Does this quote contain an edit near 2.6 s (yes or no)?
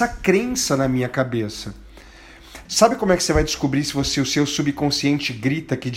yes